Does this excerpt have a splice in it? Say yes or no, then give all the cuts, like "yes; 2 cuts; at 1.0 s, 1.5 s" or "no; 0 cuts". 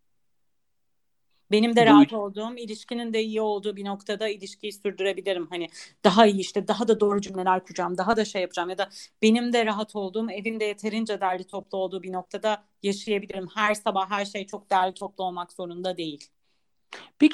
no; 0 cuts